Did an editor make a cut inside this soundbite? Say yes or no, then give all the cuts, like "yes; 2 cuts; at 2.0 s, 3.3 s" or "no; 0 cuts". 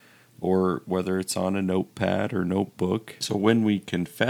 yes; 1 cut; at 3.2 s